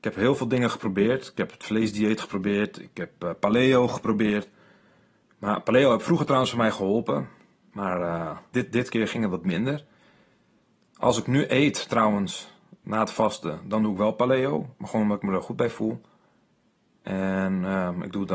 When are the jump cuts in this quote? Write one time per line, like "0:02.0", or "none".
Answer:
0:08.5

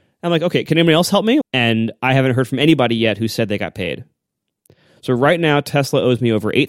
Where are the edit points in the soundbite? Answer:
0:01.4

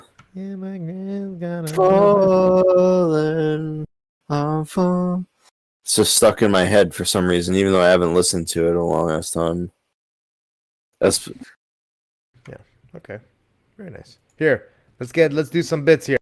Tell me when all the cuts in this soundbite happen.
none

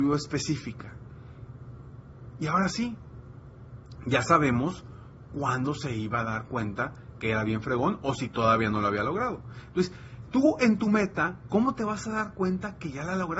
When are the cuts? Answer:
none

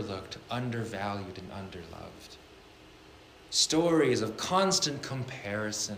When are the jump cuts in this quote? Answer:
none

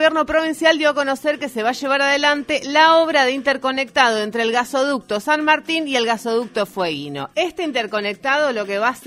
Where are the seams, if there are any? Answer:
0:07.3

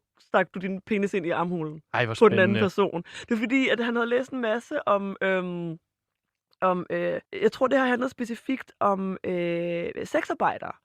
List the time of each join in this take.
0:07.2

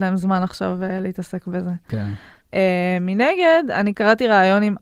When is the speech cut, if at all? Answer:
0:02.3

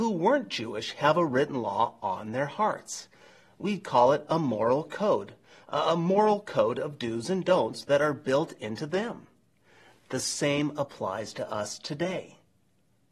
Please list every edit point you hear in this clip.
none

